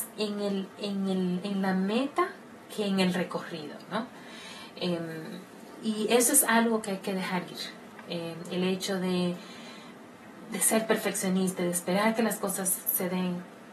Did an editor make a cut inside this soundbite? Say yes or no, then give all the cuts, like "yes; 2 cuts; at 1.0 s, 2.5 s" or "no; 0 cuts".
no; 0 cuts